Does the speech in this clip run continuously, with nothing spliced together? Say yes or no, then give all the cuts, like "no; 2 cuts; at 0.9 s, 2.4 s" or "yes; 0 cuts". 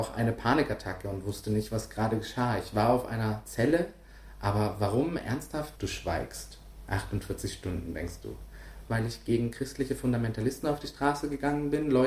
no; 2 cuts; at 5.8 s, 8.9 s